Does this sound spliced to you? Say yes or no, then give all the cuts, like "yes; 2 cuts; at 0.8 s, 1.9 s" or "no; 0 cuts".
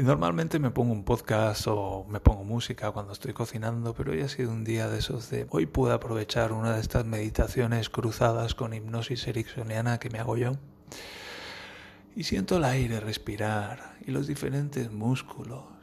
yes; 2 cuts; at 5.5 s, 12.0 s